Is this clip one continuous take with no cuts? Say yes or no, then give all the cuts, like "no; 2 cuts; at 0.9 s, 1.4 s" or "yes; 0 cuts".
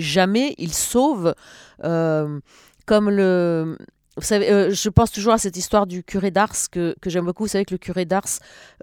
yes; 0 cuts